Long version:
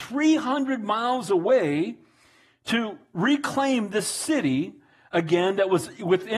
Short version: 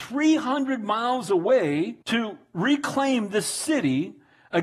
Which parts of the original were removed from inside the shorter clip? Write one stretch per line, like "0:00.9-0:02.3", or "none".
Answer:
0:02.0-0:02.6